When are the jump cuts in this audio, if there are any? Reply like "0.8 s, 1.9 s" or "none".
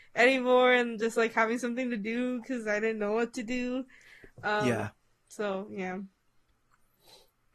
none